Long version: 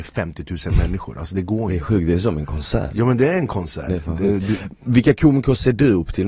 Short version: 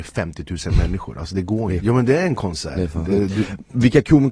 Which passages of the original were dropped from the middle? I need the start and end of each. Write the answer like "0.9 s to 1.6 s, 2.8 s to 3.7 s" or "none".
1.8 s to 2.9 s

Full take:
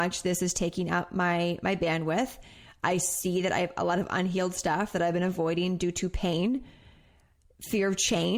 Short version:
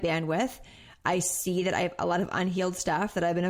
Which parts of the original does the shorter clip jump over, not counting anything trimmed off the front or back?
none

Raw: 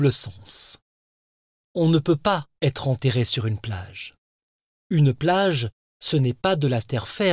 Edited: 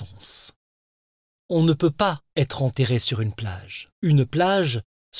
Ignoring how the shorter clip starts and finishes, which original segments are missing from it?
4.2 s to 4.8 s

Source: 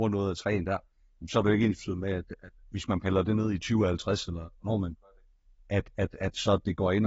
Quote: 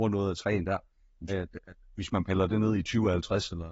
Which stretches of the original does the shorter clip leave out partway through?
1.3 s to 2.0 s

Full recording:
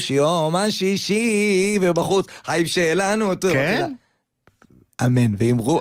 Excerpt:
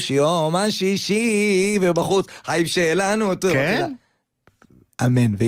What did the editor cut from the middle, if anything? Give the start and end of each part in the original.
none

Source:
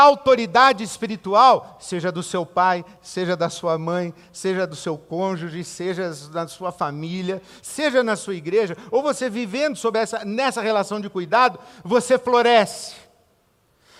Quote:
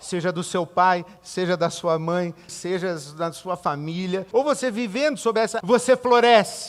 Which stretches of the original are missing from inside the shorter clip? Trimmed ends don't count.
4.3 s to 5.6 s, 7.5 s to 8.9 s, 10.2 s to 11.8 s

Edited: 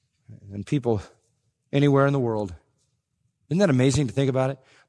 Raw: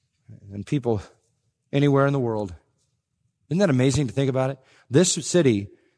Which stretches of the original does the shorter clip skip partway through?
none

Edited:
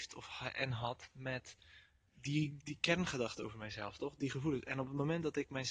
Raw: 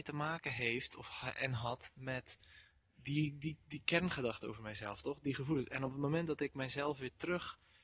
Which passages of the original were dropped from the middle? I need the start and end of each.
3.4 s to 3.6 s

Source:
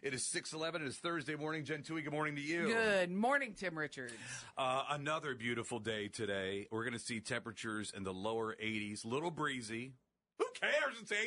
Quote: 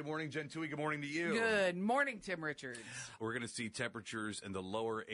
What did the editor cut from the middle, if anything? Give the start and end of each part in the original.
4.5 s to 6.7 s

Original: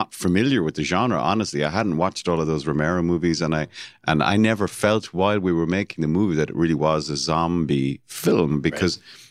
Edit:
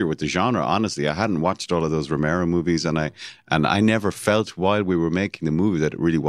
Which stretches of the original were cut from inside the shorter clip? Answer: none

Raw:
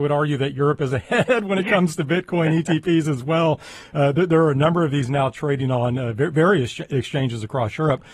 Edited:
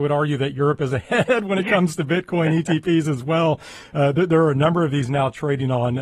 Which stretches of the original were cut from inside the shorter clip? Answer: none

